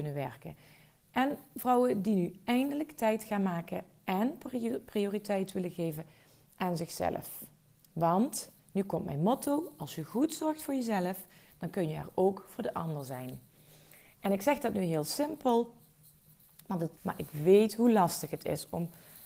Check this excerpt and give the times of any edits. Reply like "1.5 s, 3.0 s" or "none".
8.6 s, 17.0 s